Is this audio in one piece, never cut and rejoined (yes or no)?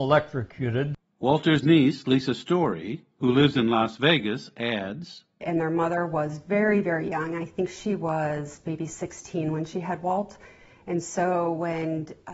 yes